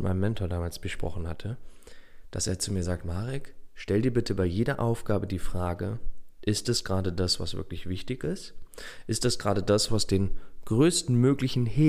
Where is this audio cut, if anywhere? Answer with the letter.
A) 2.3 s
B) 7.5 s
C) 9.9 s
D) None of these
C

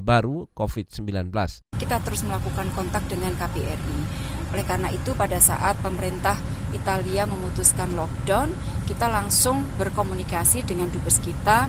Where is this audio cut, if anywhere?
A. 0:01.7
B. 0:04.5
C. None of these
A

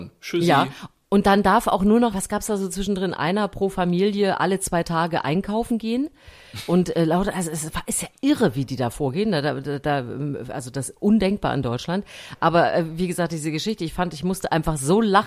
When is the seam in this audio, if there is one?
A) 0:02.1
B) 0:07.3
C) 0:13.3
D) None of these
A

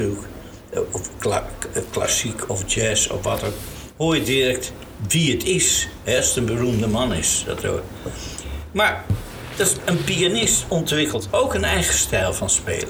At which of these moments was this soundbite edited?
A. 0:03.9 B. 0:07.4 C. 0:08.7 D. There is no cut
D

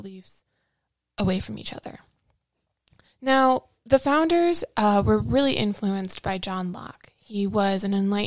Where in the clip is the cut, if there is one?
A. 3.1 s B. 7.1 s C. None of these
A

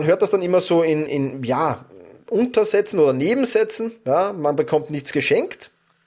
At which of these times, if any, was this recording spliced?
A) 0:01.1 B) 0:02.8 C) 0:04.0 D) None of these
A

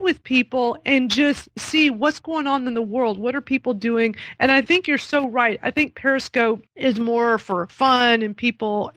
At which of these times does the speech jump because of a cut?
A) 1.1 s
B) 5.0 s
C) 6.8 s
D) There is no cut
D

